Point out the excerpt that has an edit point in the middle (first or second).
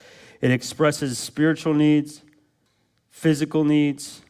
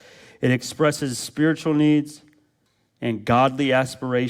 second